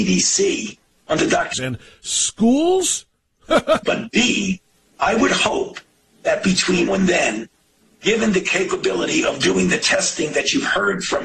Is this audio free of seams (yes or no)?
no